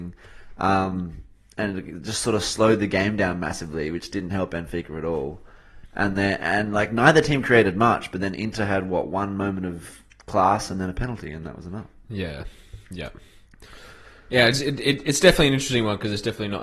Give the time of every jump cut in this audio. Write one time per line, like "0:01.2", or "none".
none